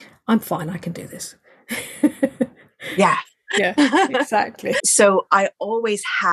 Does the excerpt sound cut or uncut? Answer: cut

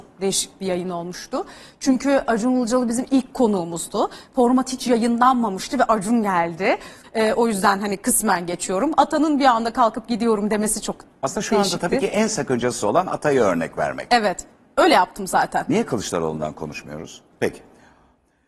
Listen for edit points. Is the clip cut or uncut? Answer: cut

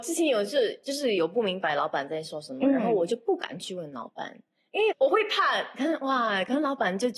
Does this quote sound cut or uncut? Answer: cut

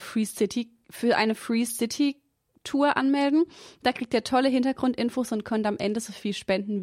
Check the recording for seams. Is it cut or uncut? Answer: uncut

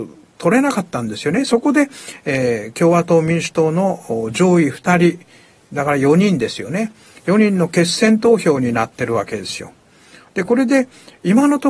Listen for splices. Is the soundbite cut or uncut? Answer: uncut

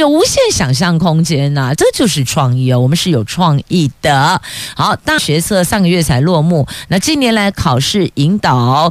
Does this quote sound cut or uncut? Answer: cut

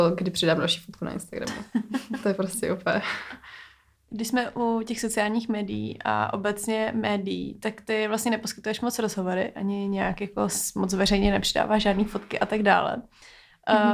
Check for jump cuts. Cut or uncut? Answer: uncut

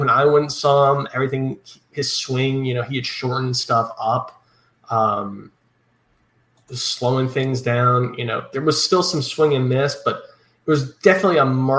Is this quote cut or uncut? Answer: uncut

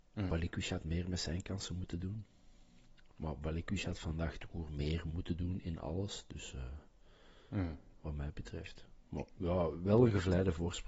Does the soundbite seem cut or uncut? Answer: uncut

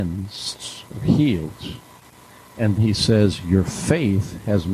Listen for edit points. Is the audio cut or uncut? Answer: cut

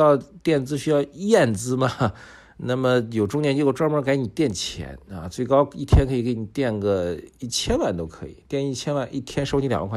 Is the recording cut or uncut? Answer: uncut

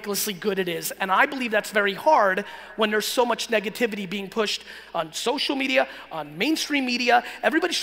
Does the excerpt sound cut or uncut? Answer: uncut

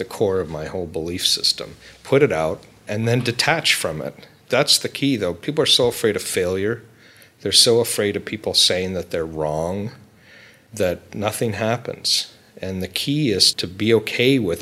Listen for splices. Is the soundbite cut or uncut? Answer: uncut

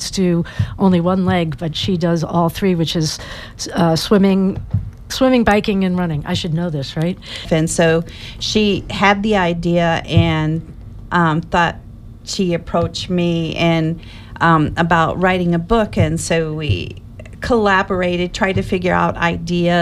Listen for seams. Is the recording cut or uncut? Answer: cut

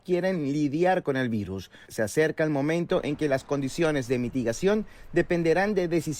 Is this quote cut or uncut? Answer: cut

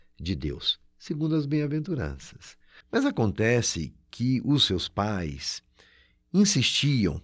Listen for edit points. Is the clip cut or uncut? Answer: cut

